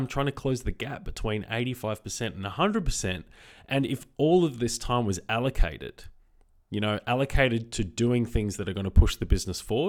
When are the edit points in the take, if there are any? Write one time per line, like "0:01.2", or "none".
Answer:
none